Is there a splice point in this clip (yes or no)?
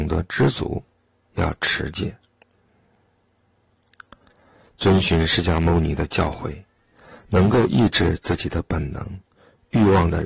no